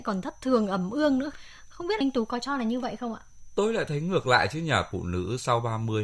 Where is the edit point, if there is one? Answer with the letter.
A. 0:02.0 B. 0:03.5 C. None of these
A